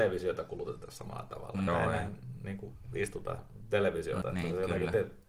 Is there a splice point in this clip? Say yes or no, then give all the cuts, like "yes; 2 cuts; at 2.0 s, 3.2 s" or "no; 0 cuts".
yes; 2 cuts; at 1.7 s, 4.2 s